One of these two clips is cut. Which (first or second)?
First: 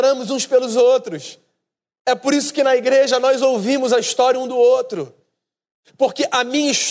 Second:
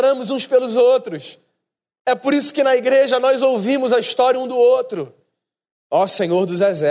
second